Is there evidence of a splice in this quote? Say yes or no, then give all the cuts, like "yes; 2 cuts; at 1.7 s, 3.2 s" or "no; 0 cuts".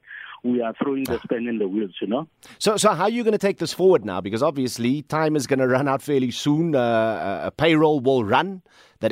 no; 0 cuts